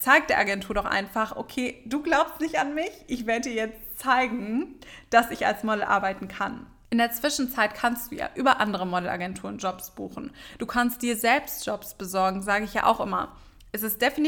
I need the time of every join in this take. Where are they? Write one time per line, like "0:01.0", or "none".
none